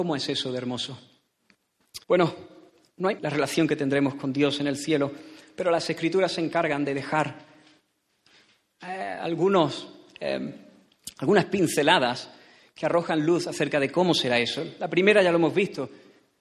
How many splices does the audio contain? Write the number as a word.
two